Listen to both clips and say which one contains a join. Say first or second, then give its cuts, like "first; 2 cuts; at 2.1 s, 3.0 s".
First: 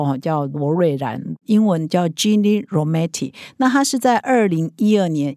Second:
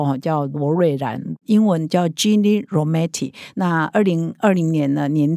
second; 1 cut; at 3.5 s